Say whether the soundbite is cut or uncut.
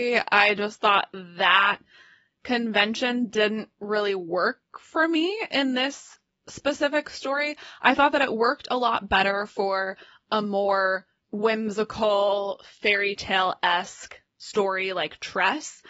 uncut